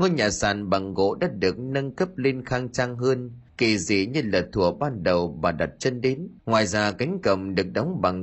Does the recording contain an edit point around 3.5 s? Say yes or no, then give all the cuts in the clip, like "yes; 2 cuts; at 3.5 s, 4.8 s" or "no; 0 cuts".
yes; 2 cuts; at 3.5 s, 6.4 s